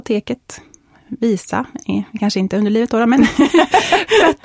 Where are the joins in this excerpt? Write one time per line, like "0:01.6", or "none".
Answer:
none